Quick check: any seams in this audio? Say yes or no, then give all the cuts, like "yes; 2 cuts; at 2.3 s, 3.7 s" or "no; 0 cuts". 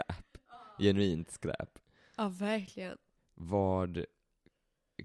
yes; 1 cut; at 3.2 s